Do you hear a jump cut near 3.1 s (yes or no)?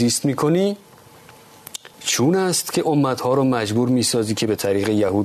no